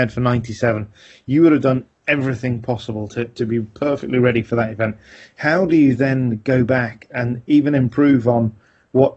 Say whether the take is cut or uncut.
uncut